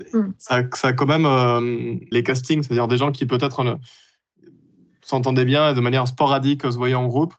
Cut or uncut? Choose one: cut